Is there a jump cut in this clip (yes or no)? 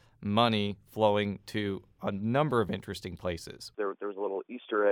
yes